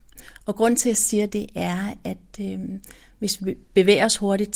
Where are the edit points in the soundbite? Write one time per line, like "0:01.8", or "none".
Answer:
0:01.3